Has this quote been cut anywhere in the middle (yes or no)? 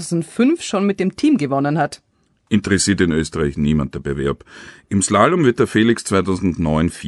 no